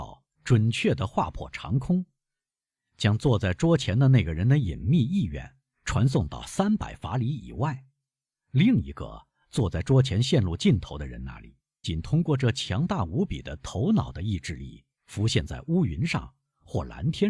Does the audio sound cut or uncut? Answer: cut